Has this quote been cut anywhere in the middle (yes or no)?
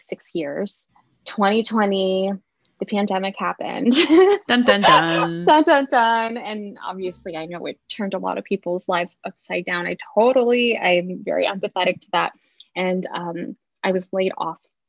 no